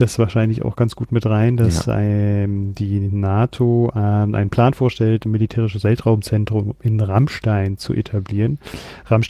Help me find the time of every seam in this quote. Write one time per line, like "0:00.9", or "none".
none